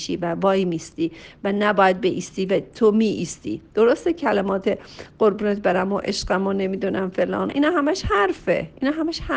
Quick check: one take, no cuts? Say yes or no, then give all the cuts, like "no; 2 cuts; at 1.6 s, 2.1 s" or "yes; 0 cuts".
no; 1 cut; at 7.5 s